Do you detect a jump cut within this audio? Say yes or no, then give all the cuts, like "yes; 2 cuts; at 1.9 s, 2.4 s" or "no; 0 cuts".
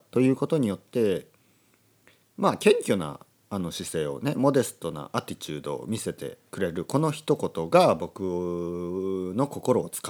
yes; 1 cut; at 6.5 s